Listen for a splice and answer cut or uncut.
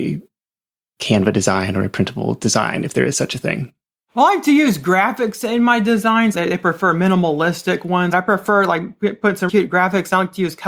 cut